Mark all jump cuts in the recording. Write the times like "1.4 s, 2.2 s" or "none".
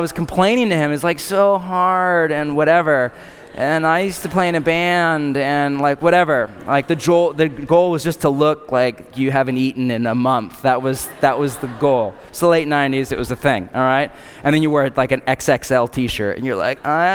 9.1 s